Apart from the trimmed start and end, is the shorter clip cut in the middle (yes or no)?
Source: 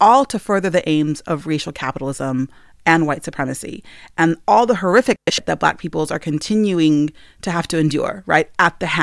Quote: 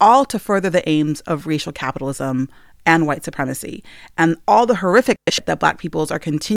no